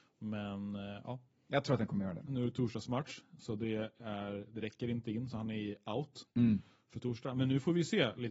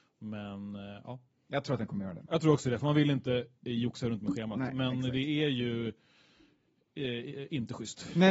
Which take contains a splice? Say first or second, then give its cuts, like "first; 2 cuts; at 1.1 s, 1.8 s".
first; 1 cut; at 2.3 s